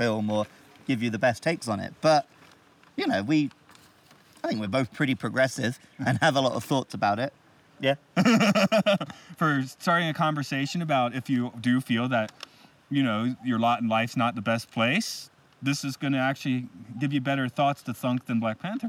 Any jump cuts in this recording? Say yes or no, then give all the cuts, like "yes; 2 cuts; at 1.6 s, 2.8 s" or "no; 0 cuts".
yes; 1 cut; at 7.7 s